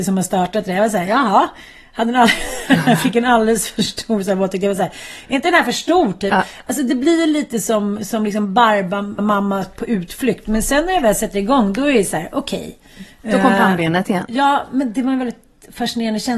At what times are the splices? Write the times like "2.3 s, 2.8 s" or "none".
9.2 s